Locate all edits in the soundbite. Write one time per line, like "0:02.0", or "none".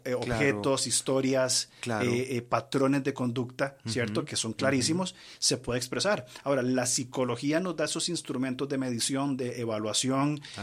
none